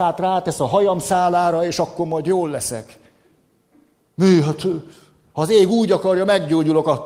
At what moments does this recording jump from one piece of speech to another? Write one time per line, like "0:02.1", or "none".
none

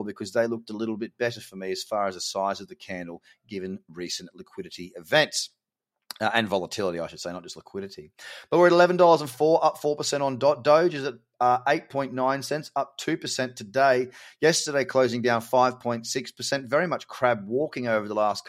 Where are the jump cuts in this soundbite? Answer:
none

